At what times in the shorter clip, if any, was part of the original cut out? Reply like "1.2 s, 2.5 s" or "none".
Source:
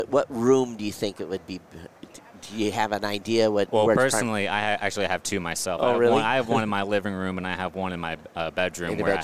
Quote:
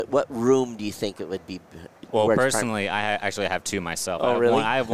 2.1 s